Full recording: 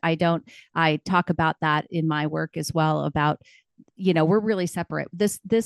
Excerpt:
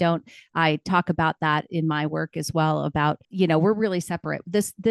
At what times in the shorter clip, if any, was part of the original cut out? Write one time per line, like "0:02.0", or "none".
0:03.2